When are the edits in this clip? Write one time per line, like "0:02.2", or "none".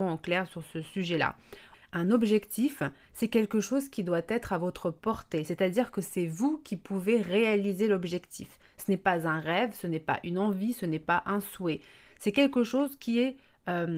0:01.7